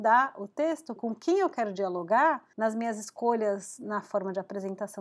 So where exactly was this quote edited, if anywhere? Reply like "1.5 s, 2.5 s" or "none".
1.0 s, 2.5 s